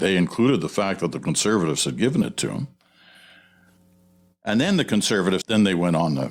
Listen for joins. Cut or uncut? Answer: cut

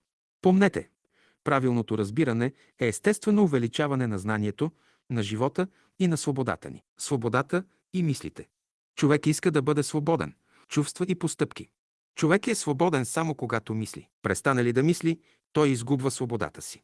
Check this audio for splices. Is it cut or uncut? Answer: cut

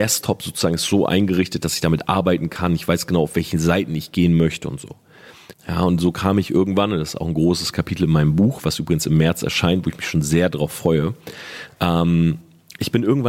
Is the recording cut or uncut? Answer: cut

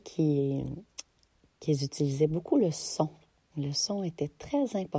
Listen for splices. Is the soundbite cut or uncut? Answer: uncut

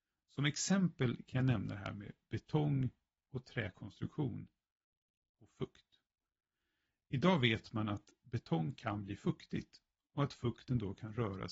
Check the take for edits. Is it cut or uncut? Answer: uncut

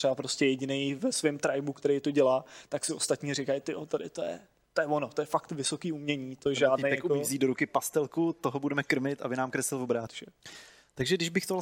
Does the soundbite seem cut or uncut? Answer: cut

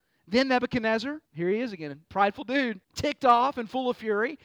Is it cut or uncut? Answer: cut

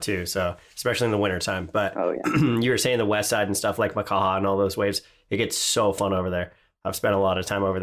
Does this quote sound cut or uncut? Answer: uncut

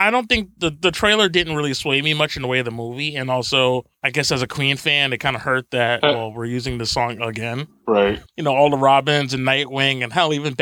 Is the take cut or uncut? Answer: cut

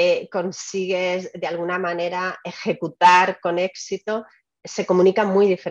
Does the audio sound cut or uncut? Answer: uncut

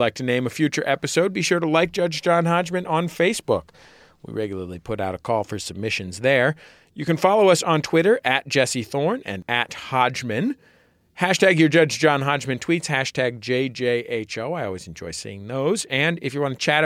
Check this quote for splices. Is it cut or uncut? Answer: uncut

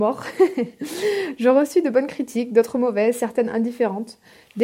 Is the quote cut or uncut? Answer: uncut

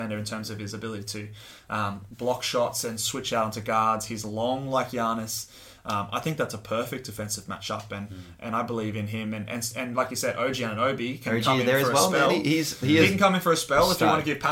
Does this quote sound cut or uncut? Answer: uncut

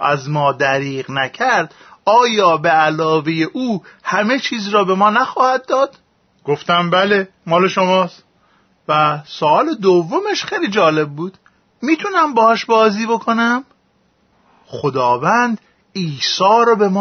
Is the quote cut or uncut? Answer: cut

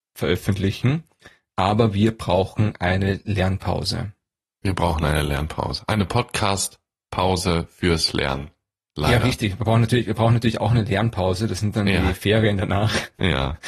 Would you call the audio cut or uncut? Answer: uncut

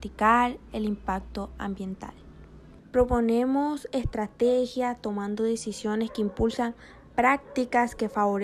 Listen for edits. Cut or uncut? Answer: cut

